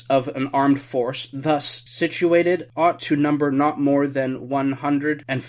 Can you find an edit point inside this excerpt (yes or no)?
no